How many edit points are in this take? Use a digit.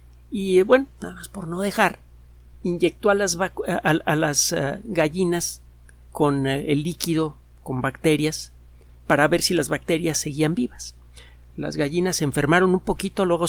0